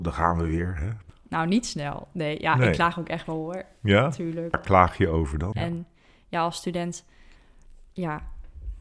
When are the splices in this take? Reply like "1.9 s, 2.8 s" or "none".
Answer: 5.5 s